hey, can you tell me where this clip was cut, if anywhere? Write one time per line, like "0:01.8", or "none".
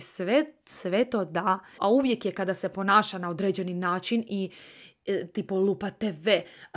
0:01.8